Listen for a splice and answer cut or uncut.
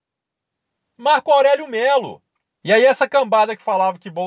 cut